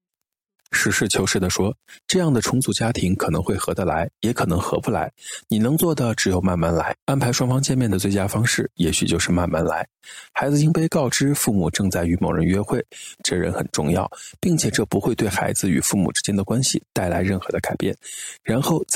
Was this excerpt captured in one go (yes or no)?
no